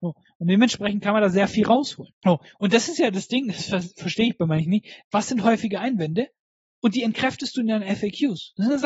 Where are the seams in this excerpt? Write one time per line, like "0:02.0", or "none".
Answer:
0:02.2
0:05.0